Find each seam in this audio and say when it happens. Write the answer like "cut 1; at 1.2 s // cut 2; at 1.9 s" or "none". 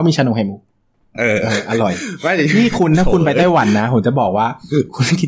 none